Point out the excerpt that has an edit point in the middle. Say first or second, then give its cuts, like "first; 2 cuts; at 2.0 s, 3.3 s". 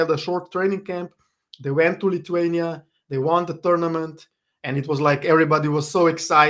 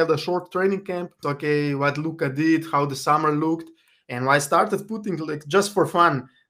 second; 1 cut; at 1.2 s